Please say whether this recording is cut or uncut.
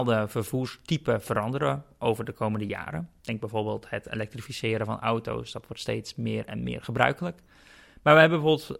uncut